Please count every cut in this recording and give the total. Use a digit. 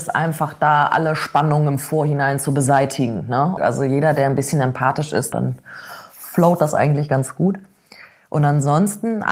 2